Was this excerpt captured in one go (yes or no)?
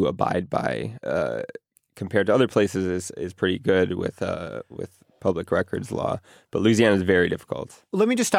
no